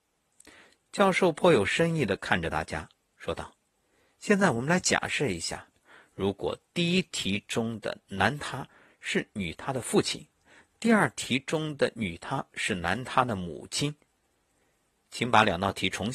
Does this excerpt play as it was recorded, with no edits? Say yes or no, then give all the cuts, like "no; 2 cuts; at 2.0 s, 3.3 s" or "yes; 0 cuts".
yes; 0 cuts